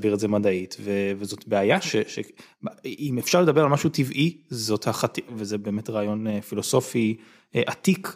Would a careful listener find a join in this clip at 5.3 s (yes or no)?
yes